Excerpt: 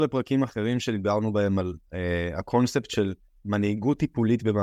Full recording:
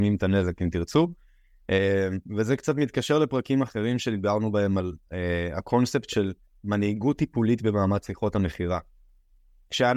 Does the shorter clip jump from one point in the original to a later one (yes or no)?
no